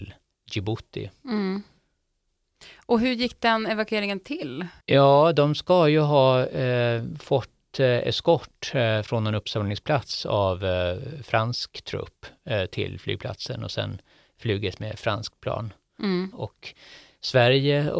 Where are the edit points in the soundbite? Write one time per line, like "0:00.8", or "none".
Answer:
0:04.8
0:16.3

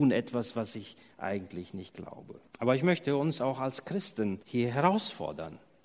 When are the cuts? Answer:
0:02.5
0:04.4

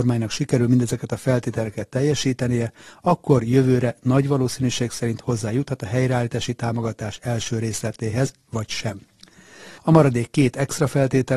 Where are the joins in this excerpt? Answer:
0:09.8

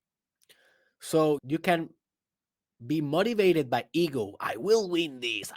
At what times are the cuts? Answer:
0:01.4

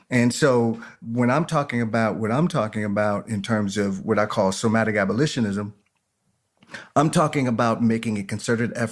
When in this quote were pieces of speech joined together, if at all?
none

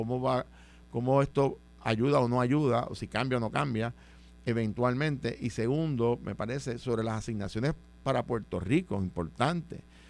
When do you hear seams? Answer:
none

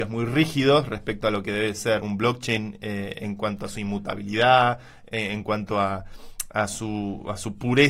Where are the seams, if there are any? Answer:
0:02.0

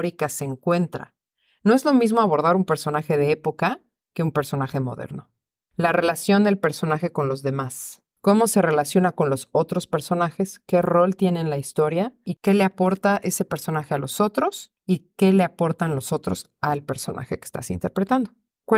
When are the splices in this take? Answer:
none

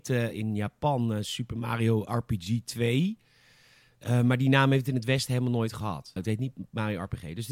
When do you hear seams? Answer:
0:06.2

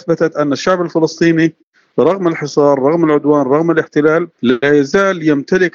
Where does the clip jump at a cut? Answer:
0:04.3

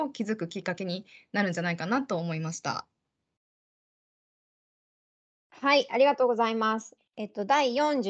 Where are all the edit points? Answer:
0:07.0

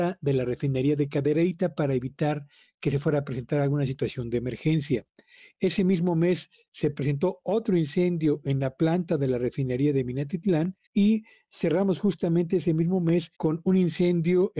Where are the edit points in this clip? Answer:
0:05.5
0:10.9
0:13.3

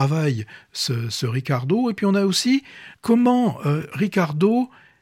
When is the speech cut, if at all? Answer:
0:02.9

